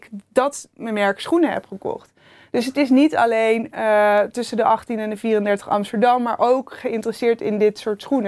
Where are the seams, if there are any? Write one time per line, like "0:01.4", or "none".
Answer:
none